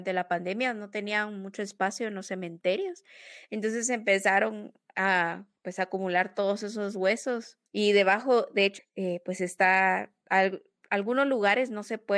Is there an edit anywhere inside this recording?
yes; 2 cuts; at 7.7 s, 8.8 s

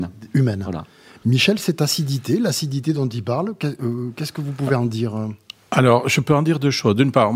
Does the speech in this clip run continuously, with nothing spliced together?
yes; 0 cuts

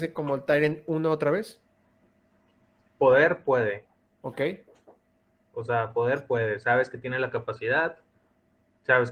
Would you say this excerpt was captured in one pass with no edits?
yes; 0 cuts

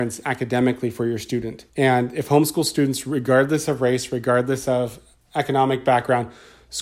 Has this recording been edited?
yes; 1 cut; at 1.7 s

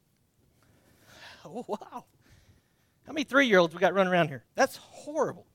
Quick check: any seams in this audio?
yes; 1 cut; at 4.5 s

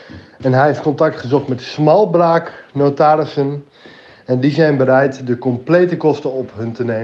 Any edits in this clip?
no; 0 cuts

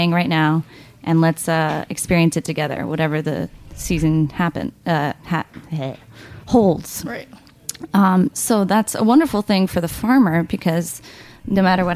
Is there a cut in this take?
no; 0 cuts

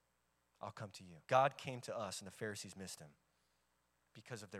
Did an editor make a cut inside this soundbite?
yes; 1 cut; at 1.2 s

